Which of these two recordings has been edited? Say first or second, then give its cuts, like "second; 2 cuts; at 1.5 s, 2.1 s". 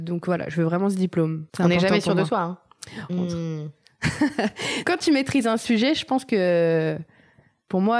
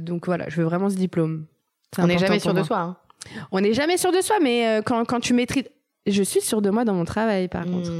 first; 3 cuts; at 1.5 s, 3.1 s, 4.8 s